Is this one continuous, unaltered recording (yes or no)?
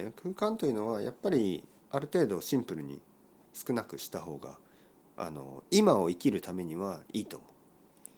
yes